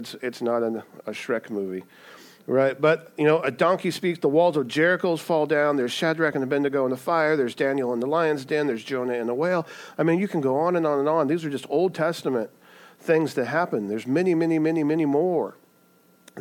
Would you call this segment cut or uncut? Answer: cut